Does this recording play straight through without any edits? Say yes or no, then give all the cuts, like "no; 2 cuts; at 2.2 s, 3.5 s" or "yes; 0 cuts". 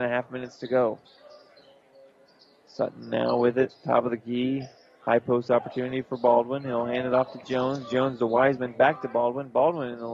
yes; 0 cuts